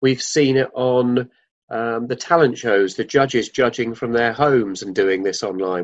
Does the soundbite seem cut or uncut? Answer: uncut